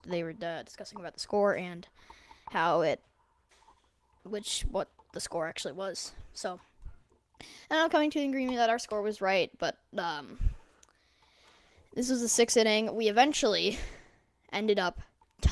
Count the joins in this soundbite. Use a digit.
0